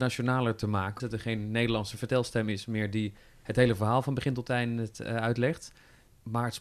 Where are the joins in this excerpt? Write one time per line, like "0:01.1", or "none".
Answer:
0:01.0